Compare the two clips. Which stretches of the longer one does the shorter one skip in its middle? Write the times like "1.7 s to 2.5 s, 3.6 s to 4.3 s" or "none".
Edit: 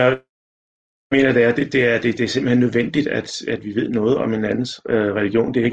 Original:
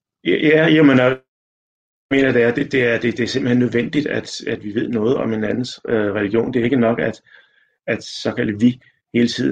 none